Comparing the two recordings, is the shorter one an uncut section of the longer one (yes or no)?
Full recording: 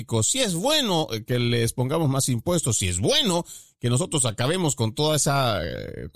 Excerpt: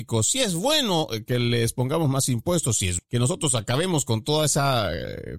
no